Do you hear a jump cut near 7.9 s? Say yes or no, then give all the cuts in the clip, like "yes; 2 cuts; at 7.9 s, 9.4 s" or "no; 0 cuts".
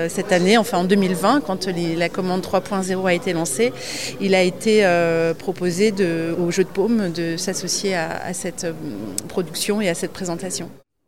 no; 1 cut; at 6.3 s